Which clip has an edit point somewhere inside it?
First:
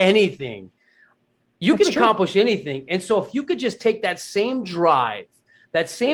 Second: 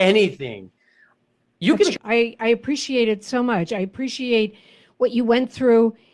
second; 1 cut; at 2.0 s

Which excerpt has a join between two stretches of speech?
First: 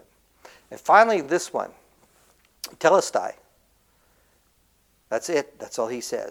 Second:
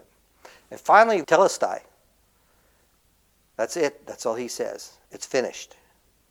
second; 1 cut; at 1.2 s

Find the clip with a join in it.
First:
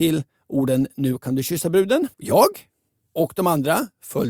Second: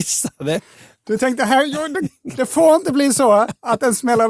first; 1 cut; at 2.1 s

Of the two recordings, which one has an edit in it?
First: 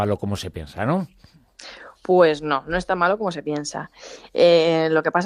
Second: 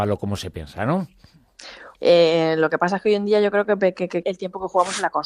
second; 2 cuts; at 1.9 s, 4.2 s

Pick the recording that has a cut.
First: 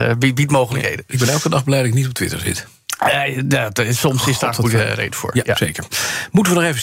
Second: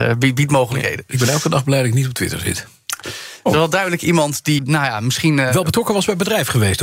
second; 2 cuts; at 3.0 s, 4.6 s

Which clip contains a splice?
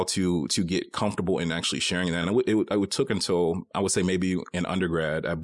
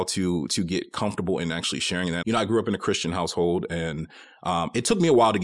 second; 1 cut; at 2.2 s

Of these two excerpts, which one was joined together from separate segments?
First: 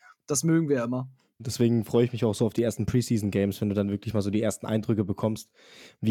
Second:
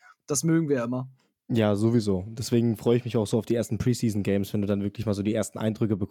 first; 1 cut; at 1.4 s

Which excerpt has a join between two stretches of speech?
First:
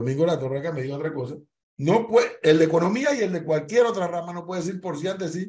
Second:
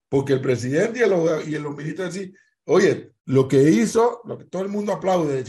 second; 1 cut; at 3.2 s

